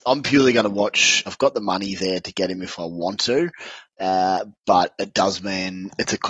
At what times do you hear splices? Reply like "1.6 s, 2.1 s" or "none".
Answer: 1.3 s